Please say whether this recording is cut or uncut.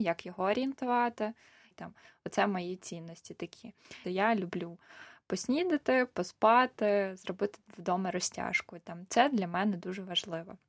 cut